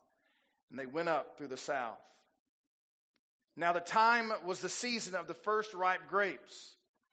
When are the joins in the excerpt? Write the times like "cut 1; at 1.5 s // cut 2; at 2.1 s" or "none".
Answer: cut 1; at 3.5 s